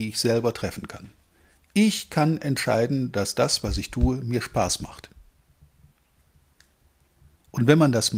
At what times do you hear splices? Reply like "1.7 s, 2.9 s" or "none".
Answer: none